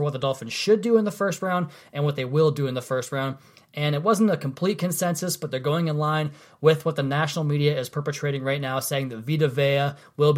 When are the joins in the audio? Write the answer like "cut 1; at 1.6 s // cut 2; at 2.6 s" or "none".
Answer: none